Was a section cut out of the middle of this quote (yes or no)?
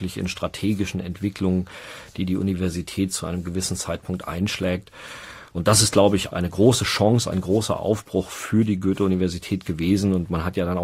yes